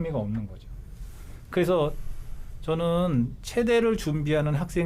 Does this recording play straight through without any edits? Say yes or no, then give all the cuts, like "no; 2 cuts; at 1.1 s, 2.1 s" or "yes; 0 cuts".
yes; 0 cuts